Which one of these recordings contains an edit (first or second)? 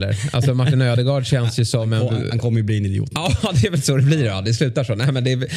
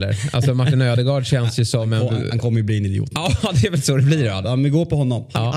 second